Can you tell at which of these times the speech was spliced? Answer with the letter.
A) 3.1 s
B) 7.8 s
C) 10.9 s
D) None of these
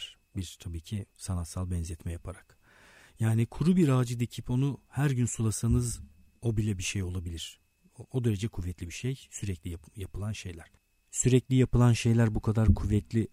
D